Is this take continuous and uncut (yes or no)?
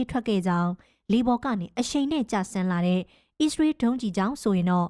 yes